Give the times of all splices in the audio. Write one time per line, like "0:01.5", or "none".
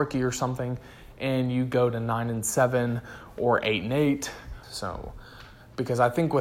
0:04.6